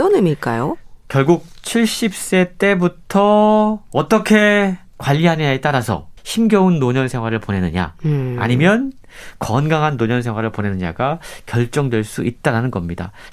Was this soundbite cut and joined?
yes; 1 cut; at 6.2 s

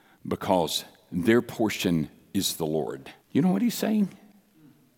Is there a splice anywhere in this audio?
yes; 1 cut; at 3.2 s

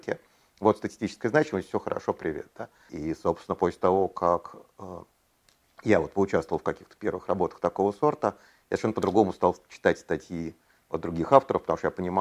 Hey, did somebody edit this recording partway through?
yes; 1 cut; at 2.9 s

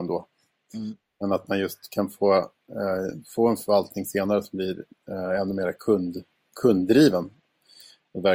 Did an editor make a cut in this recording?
no; 0 cuts

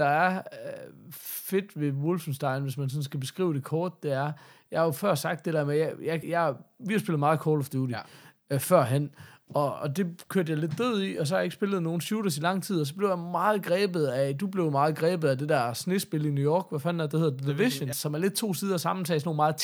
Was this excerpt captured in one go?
no; 2 cuts; at 6.2 s, 17.9 s

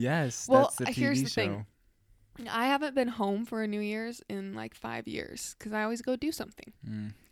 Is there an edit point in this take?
no; 0 cuts

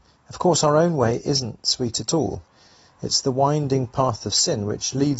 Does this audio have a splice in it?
no; 0 cuts

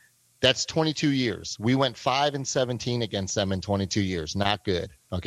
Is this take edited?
no; 0 cuts

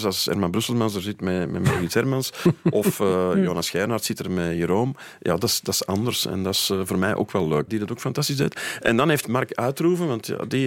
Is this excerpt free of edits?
no; 1 cut; at 7.7 s

